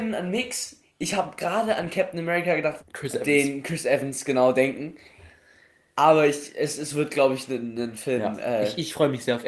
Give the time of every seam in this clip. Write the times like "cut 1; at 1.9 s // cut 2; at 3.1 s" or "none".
cut 1; at 2.8 s